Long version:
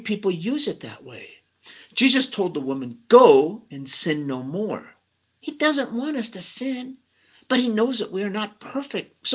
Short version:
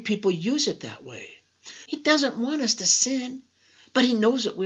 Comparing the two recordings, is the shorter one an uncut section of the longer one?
no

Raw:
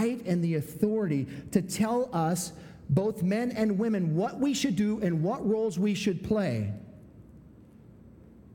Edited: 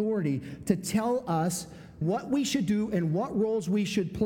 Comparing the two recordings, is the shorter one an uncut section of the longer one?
no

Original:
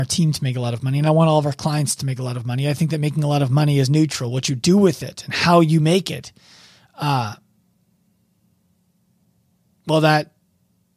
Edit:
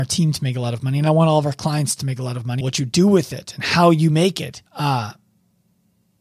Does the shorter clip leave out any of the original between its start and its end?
yes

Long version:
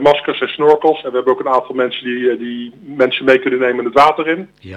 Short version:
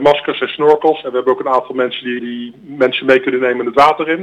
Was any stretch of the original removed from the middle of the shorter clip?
yes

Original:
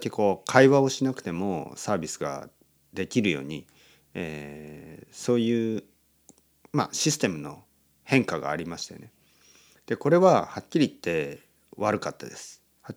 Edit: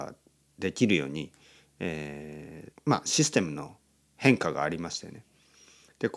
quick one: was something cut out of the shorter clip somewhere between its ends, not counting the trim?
yes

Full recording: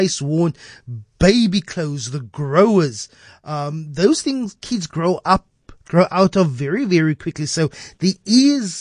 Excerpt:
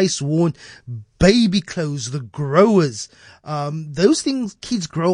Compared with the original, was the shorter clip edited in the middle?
no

